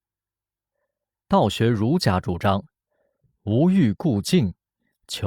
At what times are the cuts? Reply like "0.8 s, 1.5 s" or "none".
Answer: 1.2 s